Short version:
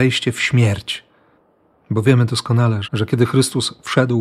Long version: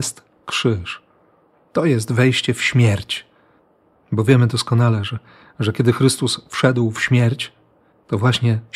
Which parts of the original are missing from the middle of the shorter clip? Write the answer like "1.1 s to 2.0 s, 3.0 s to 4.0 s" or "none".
5.1 s to 5.5 s